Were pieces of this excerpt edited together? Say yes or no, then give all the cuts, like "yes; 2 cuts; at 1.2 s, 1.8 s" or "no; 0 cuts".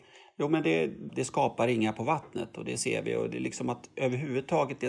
yes; 1 cut; at 1.1 s